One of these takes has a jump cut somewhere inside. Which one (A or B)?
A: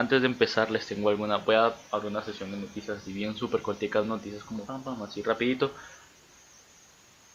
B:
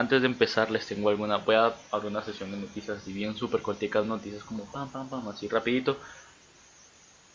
A